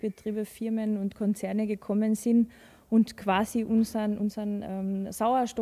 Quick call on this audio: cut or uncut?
uncut